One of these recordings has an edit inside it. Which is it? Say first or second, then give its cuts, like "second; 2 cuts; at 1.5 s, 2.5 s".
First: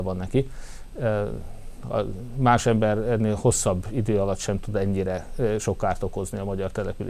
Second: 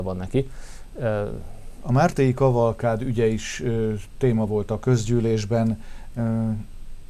second; 1 cut; at 1.8 s